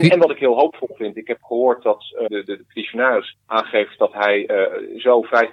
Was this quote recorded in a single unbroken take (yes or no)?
no